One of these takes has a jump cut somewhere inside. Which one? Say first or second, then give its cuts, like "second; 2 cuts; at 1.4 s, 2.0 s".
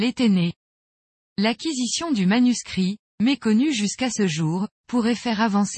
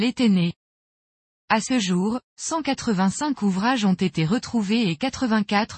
first; 1 cut; at 1.3 s